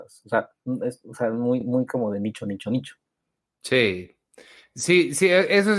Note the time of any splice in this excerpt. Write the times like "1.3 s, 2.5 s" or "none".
none